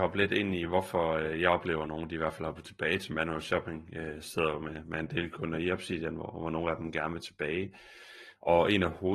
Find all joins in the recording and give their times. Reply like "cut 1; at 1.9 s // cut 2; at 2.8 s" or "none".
none

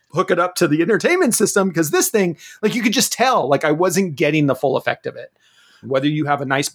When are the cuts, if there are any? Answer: cut 1; at 5.8 s

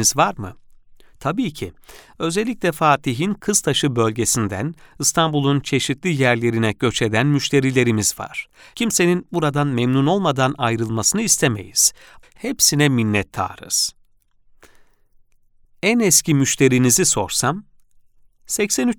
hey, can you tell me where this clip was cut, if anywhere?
cut 1; at 8.7 s // cut 2; at 12.2 s

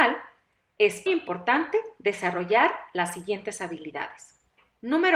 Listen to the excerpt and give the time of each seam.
cut 1; at 1.1 s

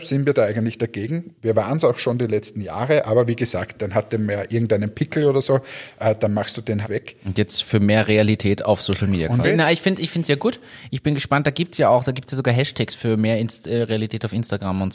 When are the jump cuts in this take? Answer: cut 1; at 6.8 s // cut 2; at 9.4 s

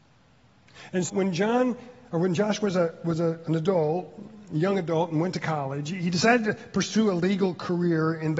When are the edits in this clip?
cut 1; at 1.1 s

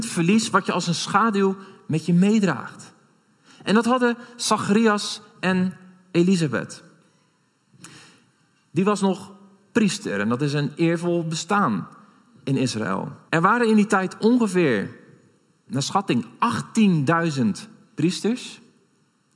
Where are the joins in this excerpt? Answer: cut 1; at 8.6 s // cut 2; at 13.3 s

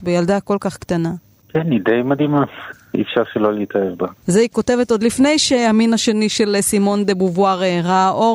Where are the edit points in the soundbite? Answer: cut 1; at 4.2 s

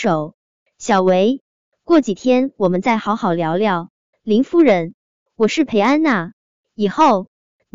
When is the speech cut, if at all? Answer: cut 1; at 4.1 s

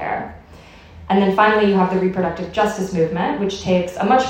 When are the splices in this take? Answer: none

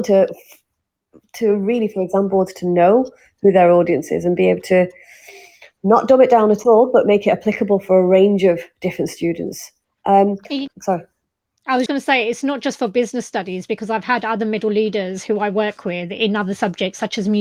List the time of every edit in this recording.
cut 1; at 10.7 s // cut 2; at 11.9 s

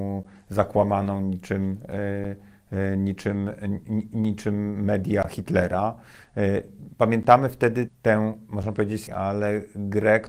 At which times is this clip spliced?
cut 1; at 7.9 s // cut 2; at 9.1 s

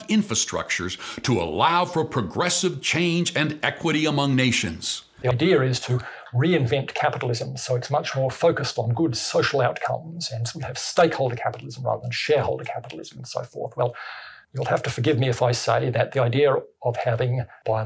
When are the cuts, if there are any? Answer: cut 1; at 5.2 s

